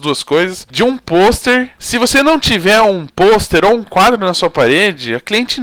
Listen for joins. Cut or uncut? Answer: cut